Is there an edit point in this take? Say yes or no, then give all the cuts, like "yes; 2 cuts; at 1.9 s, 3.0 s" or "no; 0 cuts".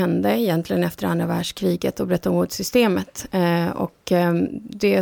no; 0 cuts